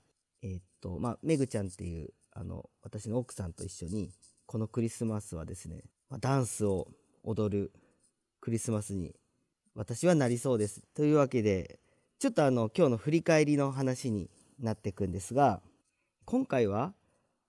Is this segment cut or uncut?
cut